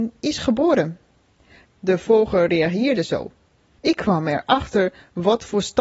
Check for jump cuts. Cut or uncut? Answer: cut